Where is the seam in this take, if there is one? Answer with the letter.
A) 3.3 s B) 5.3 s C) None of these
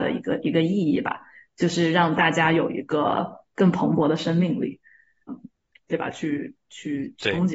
B